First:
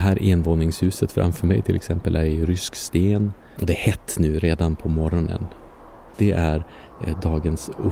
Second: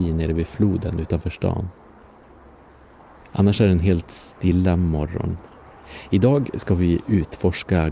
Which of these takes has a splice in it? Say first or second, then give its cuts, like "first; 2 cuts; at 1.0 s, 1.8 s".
first; 2 cuts; at 3.6 s, 6.1 s